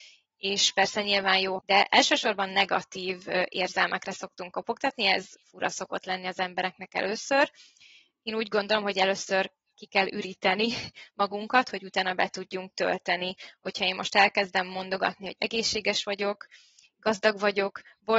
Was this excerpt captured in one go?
no; 1 cut; at 1.6 s

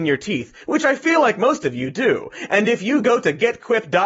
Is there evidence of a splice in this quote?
no; 0 cuts

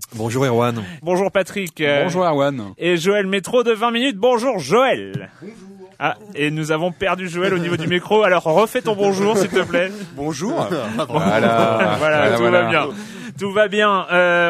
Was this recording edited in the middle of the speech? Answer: yes; 2 cuts; at 1.0 s, 5.9 s

